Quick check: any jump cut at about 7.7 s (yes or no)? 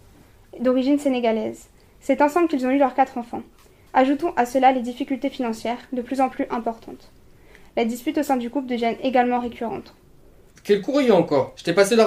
no